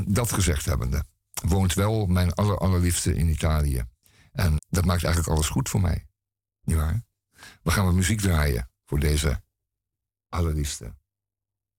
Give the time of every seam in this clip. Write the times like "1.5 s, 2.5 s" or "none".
4.6 s